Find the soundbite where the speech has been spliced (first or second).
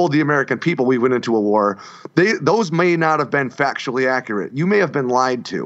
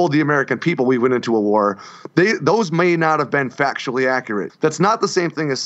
second